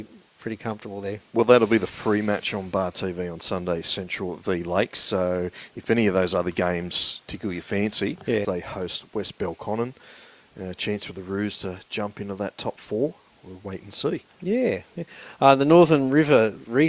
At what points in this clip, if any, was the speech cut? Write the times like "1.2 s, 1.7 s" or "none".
8.4 s